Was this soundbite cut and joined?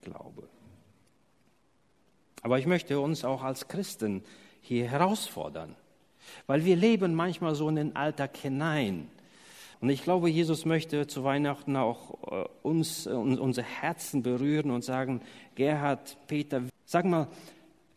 yes; 2 cuts; at 9.7 s, 16.7 s

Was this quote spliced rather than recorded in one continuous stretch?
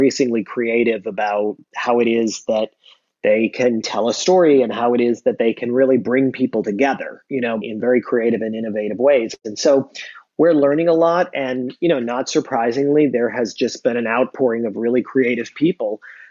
yes; 1 cut; at 7.6 s

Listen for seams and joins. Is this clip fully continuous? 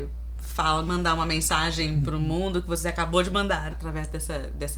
no; 1 cut; at 3.7 s

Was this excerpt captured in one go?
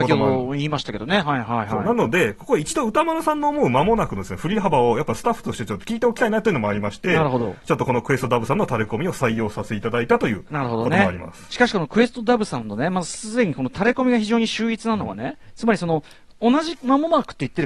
yes; 0 cuts

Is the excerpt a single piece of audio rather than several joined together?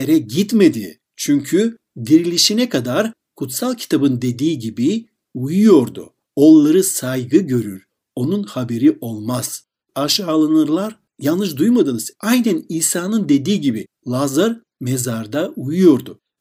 no; 3 cuts; at 6.2 s, 11.1 s, 12.2 s

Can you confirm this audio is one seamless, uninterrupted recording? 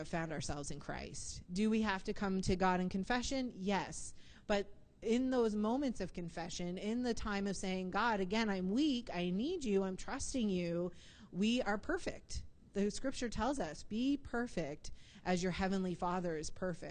no; 1 cut; at 1.4 s

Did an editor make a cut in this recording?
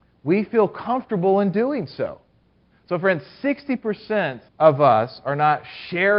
yes; 2 cuts; at 2.7 s, 4.5 s

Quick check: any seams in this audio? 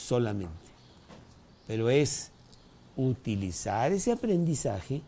yes; 1 cut; at 1.5 s

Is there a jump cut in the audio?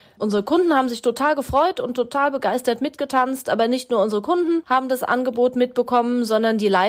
no; 0 cuts

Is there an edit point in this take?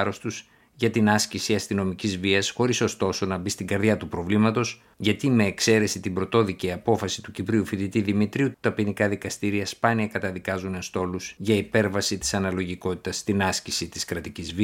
yes; 1 cut; at 4.9 s

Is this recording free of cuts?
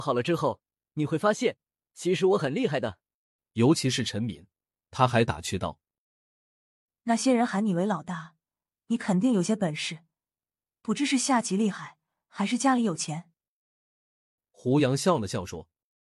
no; 1 cut; at 3.4 s

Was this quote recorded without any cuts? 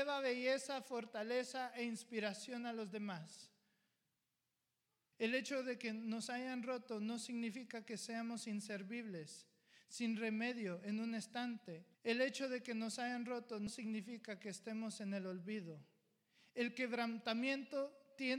no; 2 cuts; at 5.1 s, 11.9 s

